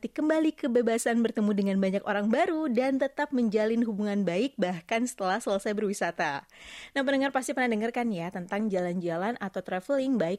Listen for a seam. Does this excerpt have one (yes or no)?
no